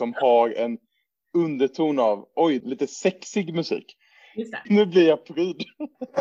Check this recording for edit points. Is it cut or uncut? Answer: cut